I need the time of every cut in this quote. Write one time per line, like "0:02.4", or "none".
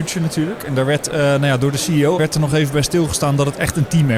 0:02.2